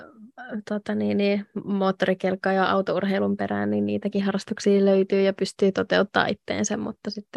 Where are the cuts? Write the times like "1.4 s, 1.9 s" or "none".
none